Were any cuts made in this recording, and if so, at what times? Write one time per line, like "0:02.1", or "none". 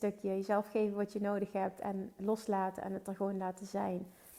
none